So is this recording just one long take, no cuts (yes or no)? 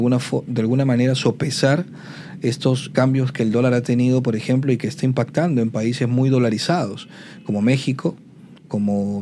no